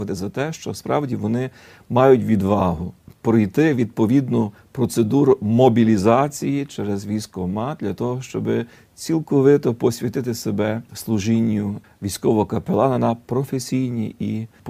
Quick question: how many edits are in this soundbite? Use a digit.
0